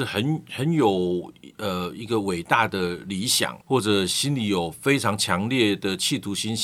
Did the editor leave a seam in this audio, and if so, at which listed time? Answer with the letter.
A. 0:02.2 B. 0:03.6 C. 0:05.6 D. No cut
B